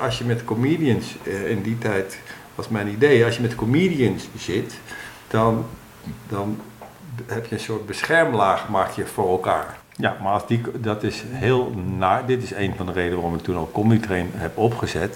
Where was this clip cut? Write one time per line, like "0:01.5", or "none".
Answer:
0:05.2
0:09.8

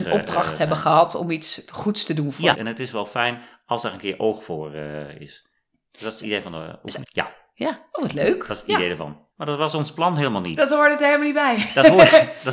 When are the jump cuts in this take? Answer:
0:02.5
0:07.0
0:09.3

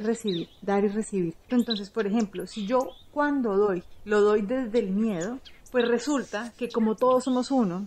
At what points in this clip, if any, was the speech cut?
0:01.5

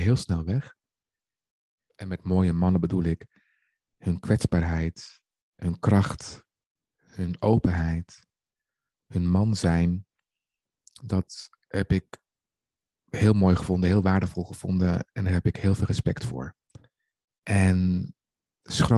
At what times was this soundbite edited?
0:01.9
0:17.2

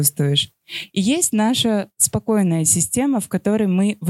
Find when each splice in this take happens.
none

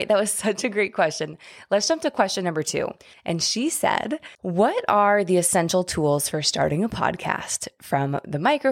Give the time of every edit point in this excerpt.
0:03.1
0:04.3

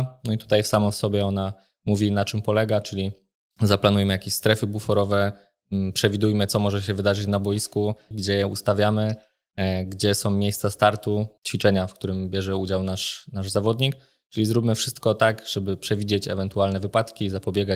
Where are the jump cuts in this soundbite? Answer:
0:08.1

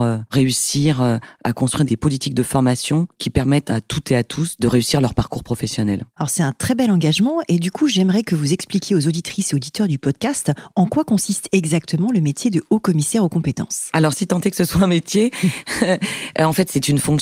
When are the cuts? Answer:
none

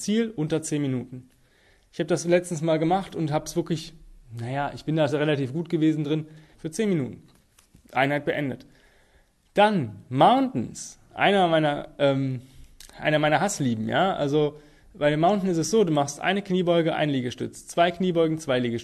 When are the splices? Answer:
0:06.5

